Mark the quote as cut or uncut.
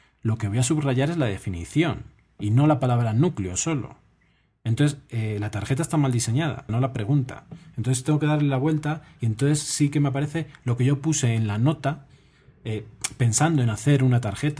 cut